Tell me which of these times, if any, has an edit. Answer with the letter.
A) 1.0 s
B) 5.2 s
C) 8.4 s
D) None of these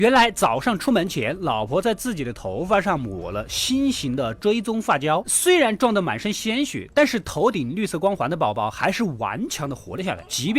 B